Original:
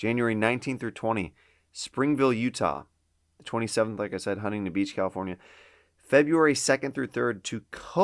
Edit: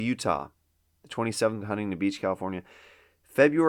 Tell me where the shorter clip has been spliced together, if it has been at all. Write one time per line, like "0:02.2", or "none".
0:01.6